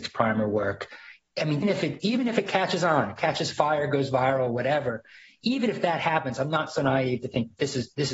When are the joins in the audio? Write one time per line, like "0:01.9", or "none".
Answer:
0:01.6